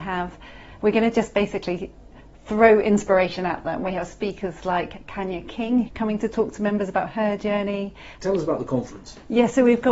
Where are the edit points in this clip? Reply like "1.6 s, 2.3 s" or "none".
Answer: 5.9 s, 8.2 s